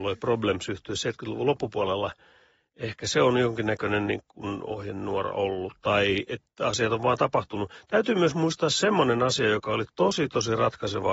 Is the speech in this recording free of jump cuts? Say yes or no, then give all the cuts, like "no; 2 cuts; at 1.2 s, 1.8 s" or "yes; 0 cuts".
yes; 0 cuts